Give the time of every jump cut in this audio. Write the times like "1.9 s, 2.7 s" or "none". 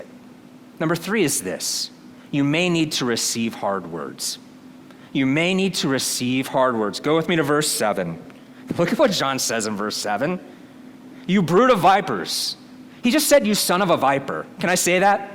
none